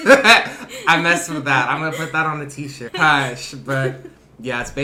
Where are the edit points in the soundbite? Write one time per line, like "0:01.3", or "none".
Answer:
0:02.9